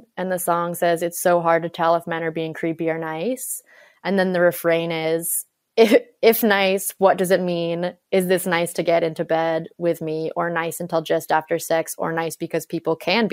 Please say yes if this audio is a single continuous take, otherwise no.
yes